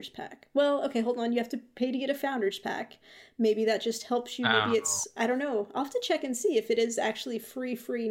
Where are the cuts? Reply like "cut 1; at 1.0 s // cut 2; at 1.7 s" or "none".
none

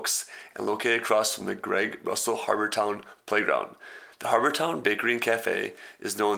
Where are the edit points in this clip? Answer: none

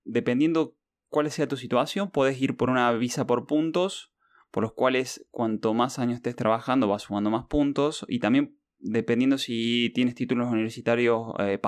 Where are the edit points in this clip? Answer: none

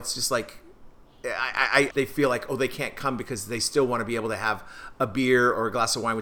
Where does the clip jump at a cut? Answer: cut 1; at 1.9 s

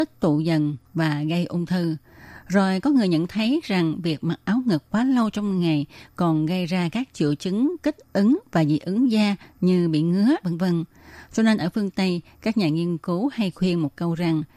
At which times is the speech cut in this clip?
cut 1; at 10.4 s

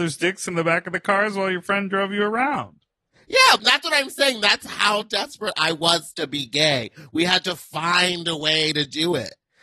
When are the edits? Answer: cut 1; at 3.6 s

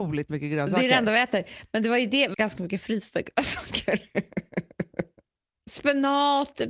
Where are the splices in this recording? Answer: cut 1; at 2.3 s

